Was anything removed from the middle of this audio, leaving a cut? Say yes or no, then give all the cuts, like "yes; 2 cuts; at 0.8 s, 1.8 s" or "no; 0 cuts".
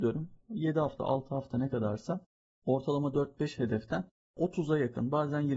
yes; 1 cut; at 1.0 s